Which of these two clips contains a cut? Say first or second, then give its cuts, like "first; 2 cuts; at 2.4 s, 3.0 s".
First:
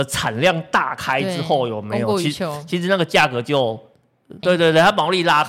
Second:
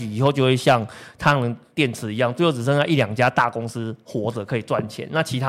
first; 1 cut; at 4.4 s